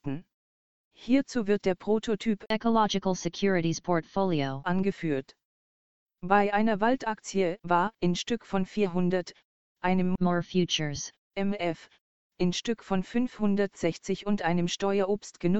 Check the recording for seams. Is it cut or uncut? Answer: cut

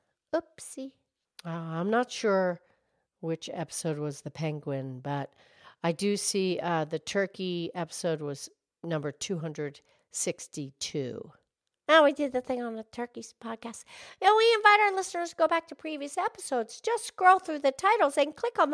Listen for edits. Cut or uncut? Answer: cut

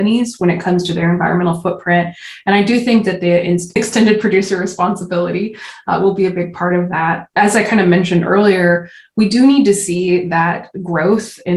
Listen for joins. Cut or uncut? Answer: uncut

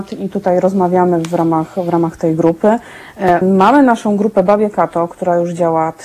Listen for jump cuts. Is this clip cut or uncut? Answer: cut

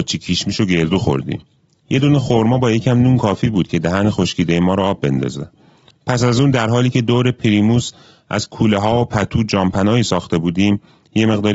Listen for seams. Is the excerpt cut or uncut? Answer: uncut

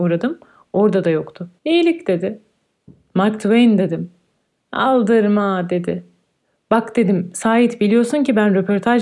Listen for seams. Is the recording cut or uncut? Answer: cut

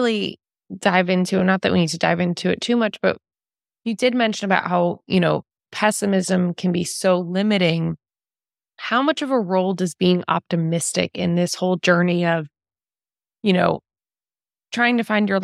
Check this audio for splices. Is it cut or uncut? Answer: uncut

